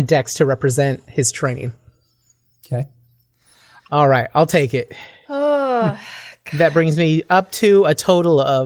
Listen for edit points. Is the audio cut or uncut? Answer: cut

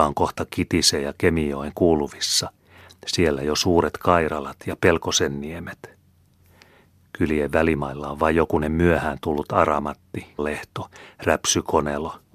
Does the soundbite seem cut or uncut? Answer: cut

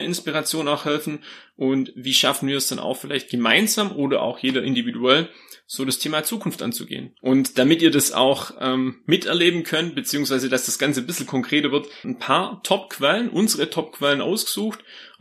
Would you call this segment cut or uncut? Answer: cut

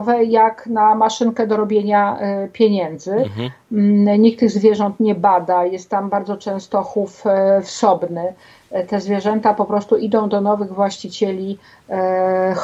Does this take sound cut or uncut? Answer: uncut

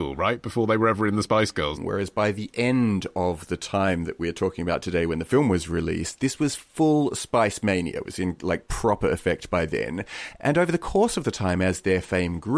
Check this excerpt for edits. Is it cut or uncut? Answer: cut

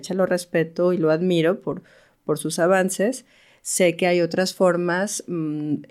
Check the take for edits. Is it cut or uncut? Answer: uncut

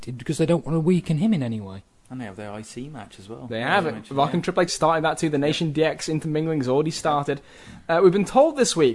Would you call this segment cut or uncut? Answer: cut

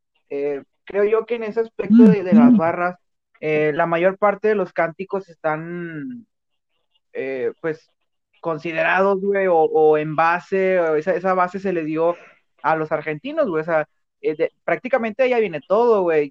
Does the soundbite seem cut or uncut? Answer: uncut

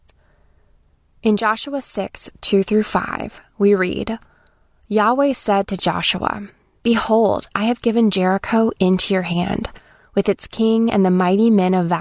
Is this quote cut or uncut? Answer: uncut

